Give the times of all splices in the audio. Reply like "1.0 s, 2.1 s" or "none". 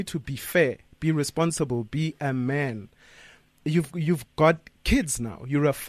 none